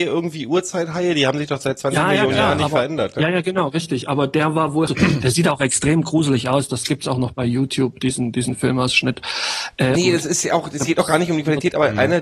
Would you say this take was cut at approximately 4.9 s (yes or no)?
yes